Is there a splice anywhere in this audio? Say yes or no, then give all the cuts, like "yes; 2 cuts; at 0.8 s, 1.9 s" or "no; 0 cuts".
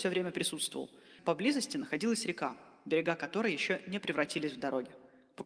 yes; 1 cut; at 1.2 s